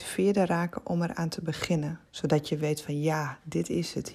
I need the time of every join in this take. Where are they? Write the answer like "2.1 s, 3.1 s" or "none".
2.1 s